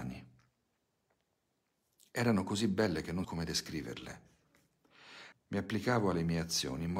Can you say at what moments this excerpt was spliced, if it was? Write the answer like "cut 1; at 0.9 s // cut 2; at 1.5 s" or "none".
cut 1; at 3.2 s // cut 2; at 5.3 s

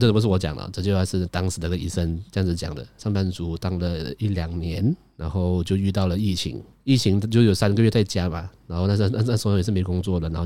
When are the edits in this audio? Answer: cut 1; at 3.0 s

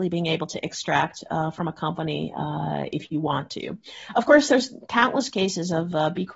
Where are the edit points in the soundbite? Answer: none

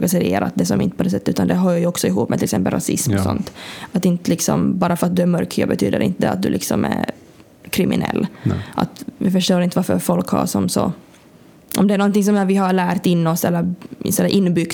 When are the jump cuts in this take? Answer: none

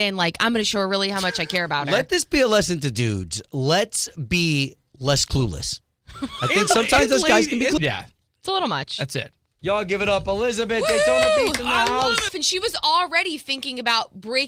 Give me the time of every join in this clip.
cut 1; at 7.8 s // cut 2; at 12.3 s

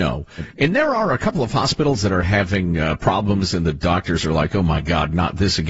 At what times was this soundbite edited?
none

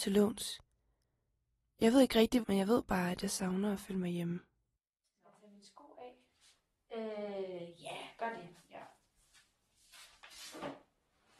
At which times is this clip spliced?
cut 1; at 2.4 s

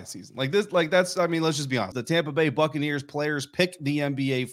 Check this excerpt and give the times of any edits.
cut 1; at 1.9 s

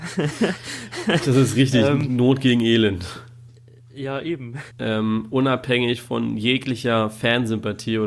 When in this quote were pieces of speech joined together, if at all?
cut 1; at 3.5 s // cut 2; at 4.7 s

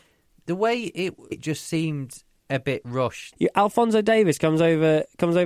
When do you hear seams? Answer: cut 1; at 1.3 s // cut 2; at 3.3 s

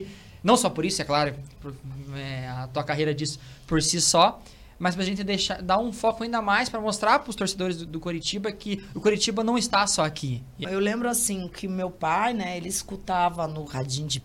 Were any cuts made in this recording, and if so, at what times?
cut 1; at 1.6 s // cut 2; at 10.6 s

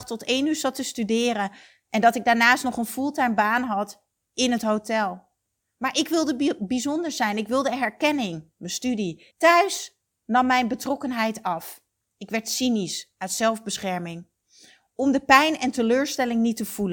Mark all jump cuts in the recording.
cut 1; at 9.3 s

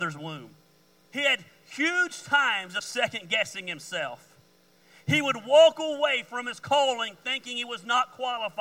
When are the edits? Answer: cut 1; at 1.1 s

